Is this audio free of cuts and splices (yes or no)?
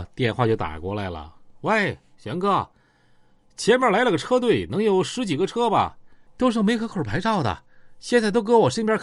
yes